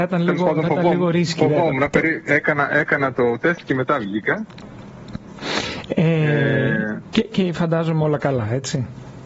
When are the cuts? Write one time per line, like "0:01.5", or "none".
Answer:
none